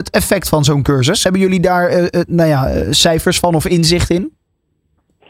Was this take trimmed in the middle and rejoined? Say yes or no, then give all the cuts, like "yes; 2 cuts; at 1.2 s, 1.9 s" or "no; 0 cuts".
no; 0 cuts